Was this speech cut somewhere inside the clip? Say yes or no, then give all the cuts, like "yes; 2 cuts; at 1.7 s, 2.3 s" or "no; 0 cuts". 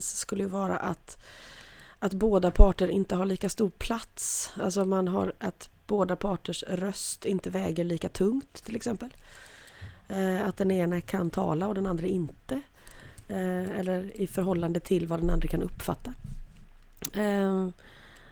no; 0 cuts